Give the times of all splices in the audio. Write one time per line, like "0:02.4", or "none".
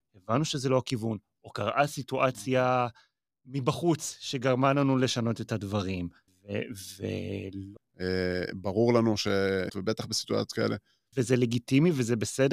0:07.8
0:09.7
0:11.1

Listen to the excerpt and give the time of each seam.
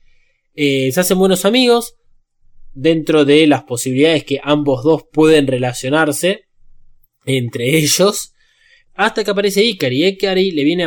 0:08.9

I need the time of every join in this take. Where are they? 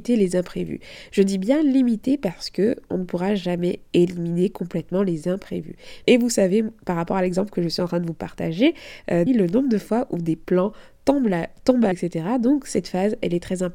0:06.0
0:09.3
0:11.9

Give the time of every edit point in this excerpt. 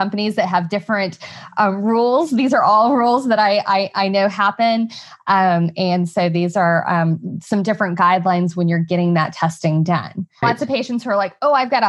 0:10.4

